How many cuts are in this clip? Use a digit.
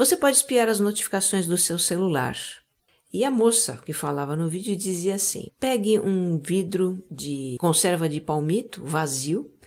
2